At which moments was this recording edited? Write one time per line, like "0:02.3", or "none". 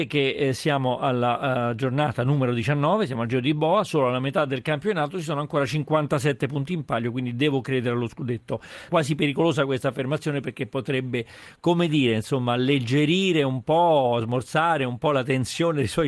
0:08.9